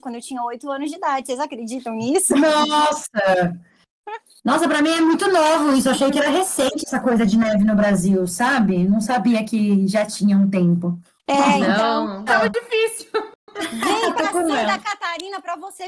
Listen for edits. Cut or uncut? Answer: cut